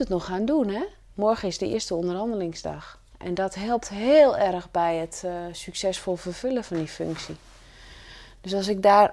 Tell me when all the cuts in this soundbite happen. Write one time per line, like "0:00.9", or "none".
0:03.1